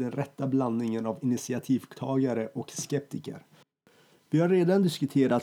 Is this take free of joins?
yes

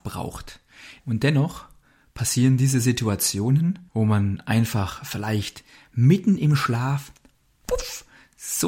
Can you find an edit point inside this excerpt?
yes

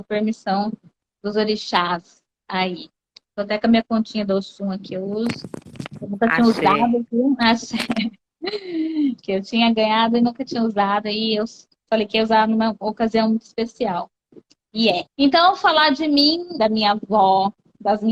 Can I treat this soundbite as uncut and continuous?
no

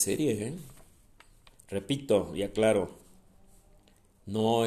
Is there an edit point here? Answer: no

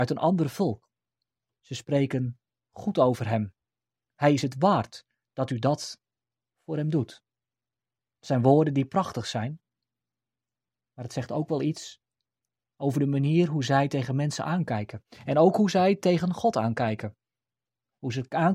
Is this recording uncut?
yes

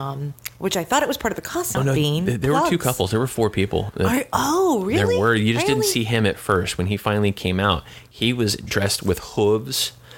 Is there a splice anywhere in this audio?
yes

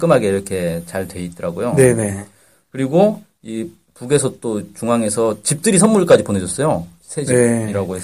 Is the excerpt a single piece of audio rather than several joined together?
yes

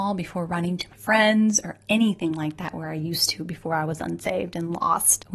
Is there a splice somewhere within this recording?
no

